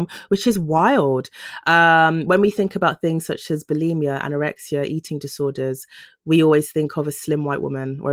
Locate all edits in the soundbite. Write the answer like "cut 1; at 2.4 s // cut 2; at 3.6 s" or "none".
none